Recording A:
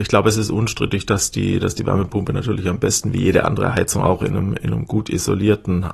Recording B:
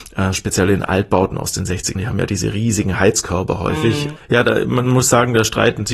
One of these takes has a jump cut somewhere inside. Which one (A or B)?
B